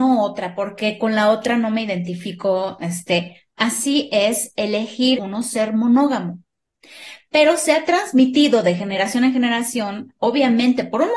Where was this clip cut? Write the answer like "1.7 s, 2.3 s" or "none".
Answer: 5.1 s